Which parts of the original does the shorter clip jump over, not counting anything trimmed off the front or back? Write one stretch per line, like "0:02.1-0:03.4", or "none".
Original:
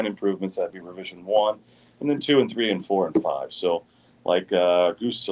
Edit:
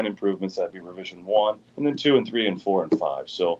0:01.7-0:01.9